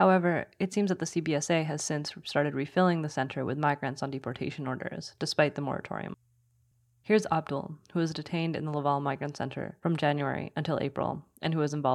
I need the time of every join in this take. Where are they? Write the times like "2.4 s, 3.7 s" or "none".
none